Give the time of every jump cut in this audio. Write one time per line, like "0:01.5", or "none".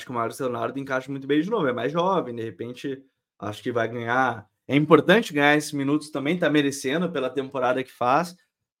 none